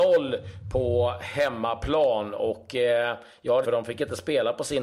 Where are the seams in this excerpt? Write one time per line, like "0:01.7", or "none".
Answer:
0:03.6